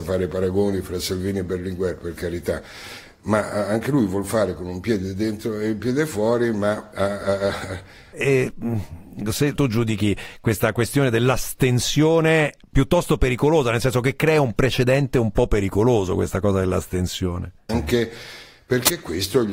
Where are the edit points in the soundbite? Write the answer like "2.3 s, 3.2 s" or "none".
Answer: 8.1 s, 9.6 s, 17.7 s